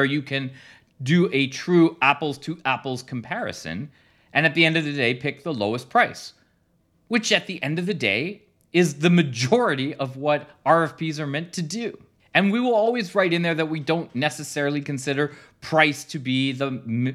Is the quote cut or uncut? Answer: uncut